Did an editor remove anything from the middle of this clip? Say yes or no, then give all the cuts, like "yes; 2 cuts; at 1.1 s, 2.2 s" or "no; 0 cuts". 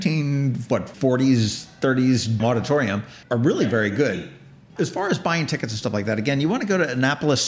no; 0 cuts